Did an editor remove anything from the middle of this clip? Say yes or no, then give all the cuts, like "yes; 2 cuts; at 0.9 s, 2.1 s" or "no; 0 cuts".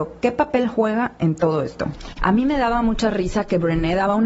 yes; 1 cut; at 2.2 s